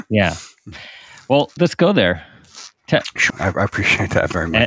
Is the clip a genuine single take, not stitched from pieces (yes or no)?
no